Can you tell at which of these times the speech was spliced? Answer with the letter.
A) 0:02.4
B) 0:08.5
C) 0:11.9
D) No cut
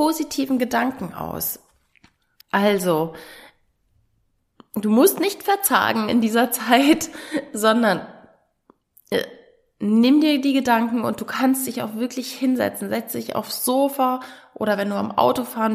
A